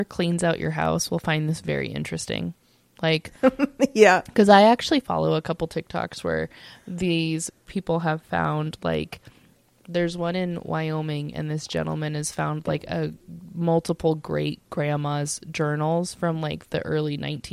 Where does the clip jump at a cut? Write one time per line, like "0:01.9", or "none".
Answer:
none